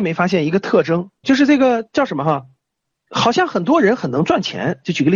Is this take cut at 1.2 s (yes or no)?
yes